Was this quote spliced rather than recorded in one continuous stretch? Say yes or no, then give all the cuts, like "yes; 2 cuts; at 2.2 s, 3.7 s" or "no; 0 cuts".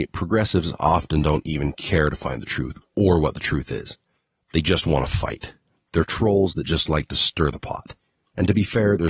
no; 0 cuts